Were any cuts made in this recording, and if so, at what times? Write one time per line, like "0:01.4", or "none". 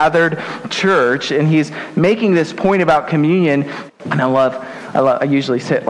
0:03.9

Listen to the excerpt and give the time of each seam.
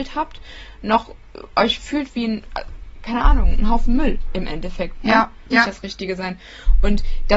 0:05.5

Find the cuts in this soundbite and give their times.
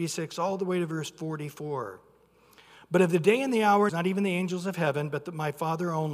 0:03.9

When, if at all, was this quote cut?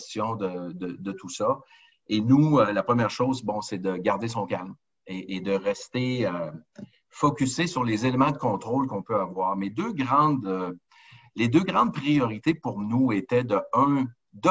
none

